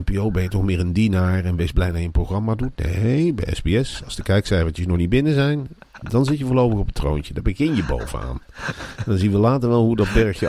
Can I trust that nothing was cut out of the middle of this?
yes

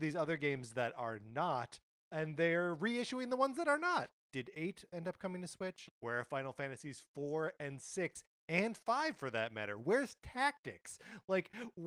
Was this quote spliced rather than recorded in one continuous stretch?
yes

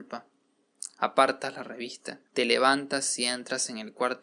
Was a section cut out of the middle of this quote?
yes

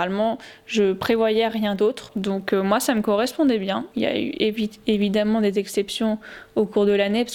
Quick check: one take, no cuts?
no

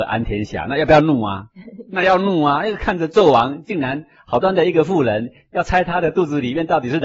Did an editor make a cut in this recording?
yes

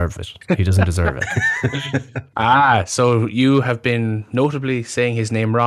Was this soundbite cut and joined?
no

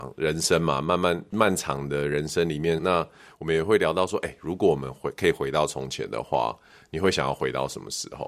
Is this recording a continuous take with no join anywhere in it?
no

